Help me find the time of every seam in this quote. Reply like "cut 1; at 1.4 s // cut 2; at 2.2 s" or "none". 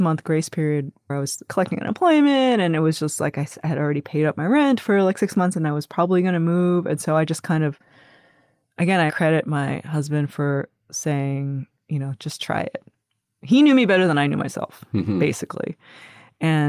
cut 1; at 9.1 s